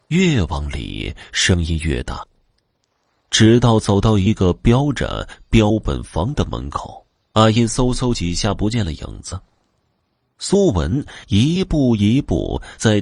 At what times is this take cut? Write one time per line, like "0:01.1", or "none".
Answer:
0:07.3